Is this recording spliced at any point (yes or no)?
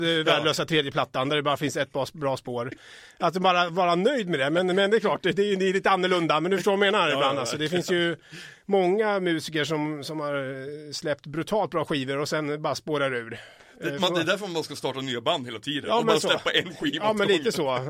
no